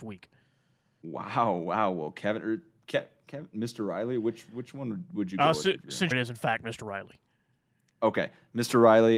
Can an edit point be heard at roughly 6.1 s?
yes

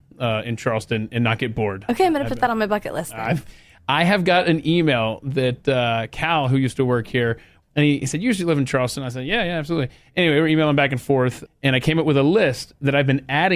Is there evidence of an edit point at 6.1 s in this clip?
no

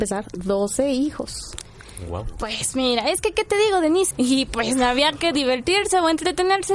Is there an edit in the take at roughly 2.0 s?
no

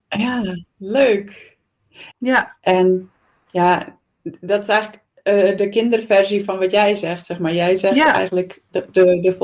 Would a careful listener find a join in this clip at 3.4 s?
no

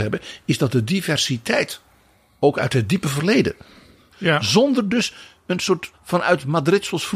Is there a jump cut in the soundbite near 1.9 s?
no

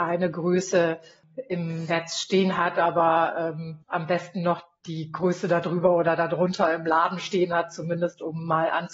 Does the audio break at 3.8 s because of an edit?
yes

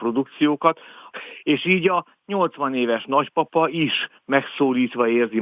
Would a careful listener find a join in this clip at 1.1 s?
yes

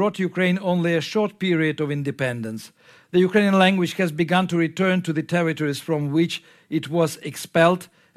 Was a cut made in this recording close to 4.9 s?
no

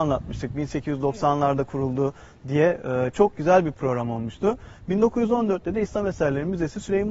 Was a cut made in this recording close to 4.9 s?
no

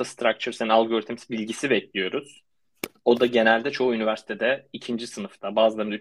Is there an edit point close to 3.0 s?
no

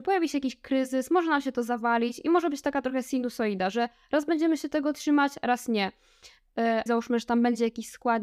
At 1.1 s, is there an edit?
no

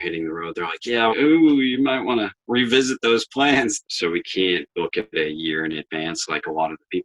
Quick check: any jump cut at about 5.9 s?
no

